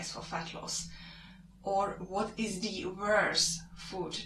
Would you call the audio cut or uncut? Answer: uncut